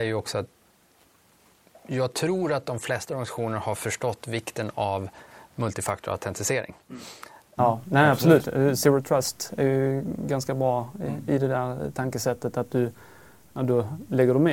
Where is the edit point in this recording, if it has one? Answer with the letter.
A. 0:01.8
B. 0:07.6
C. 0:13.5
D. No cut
B